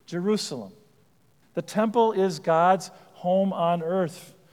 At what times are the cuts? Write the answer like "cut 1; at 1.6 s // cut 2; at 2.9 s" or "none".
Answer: cut 1; at 1.4 s